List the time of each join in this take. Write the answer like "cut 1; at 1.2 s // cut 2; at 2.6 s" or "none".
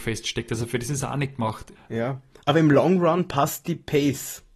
cut 1; at 1.8 s